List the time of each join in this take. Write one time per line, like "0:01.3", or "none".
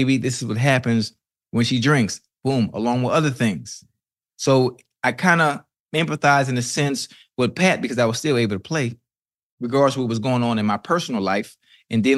none